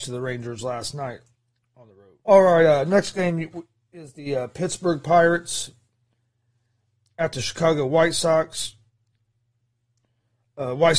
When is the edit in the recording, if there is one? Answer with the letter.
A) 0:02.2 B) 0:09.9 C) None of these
A